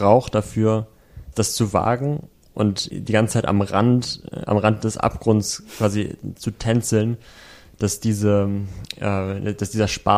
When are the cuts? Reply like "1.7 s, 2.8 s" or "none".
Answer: 2.9 s